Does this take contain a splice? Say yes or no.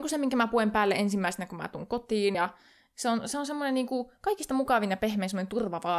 no